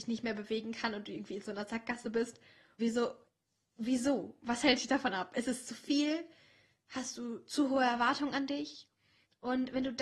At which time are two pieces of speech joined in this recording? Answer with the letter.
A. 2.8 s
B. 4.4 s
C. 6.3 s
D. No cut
A